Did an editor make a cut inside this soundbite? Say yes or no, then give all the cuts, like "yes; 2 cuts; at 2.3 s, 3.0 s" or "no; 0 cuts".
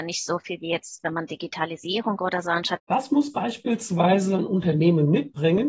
yes; 1 cut; at 2.8 s